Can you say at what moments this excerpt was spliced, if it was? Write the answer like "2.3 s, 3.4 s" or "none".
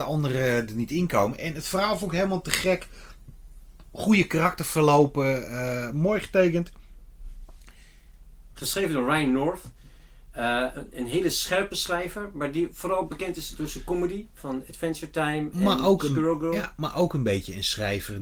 8.5 s